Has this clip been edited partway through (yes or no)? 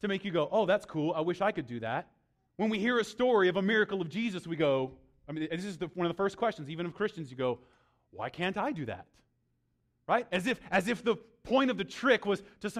yes